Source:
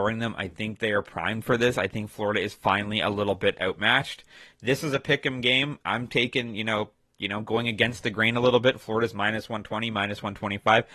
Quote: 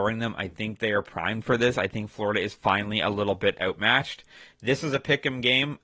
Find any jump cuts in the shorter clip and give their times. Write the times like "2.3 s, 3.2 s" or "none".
none